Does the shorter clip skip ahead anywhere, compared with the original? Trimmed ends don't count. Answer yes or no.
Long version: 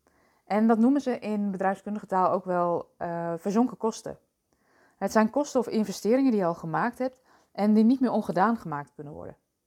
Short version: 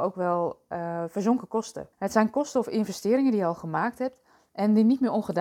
yes